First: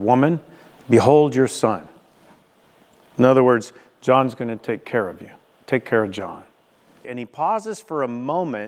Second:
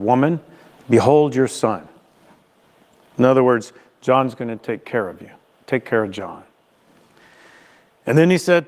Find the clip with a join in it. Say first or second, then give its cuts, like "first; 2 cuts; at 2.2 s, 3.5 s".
first; 1 cut; at 7.0 s